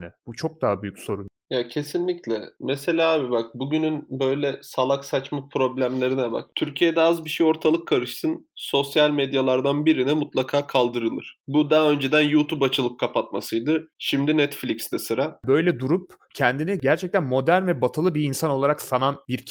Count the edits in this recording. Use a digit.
2